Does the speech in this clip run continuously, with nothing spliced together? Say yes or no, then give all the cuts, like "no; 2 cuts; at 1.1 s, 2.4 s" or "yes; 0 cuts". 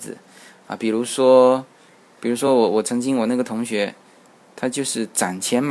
yes; 0 cuts